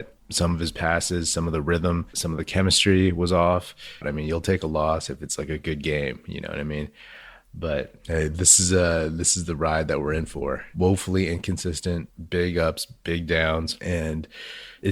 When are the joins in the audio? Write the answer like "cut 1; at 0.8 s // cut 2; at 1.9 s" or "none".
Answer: cut 1; at 4.0 s